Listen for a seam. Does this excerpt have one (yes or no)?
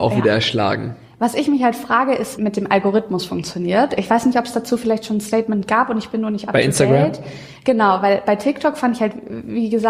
yes